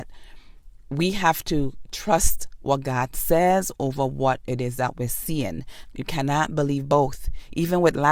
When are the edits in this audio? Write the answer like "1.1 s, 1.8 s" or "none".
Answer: 5.8 s